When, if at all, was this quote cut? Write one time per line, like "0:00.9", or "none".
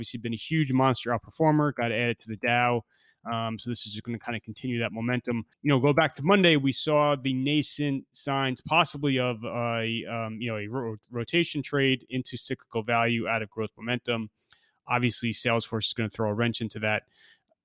0:05.5